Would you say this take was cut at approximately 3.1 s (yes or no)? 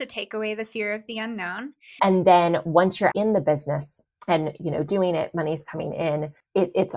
yes